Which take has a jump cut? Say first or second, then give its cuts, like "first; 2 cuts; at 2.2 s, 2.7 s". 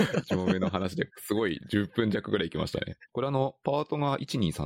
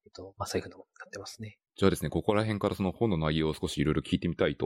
first; 1 cut; at 3.1 s